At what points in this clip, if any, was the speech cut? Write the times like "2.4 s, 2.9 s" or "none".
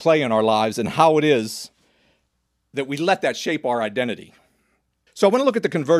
5.1 s